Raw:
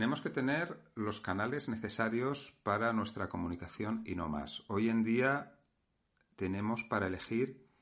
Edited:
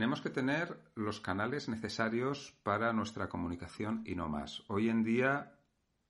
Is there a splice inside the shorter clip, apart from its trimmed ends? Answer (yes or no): no